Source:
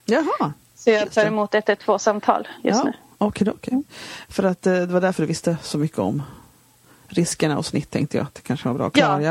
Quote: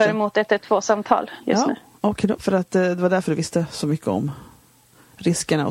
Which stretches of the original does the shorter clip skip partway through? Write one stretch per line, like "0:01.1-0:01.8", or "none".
0:03.5-0:04.3